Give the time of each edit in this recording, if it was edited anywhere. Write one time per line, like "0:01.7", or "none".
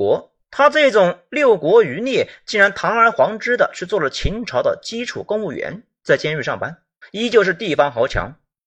0:07.0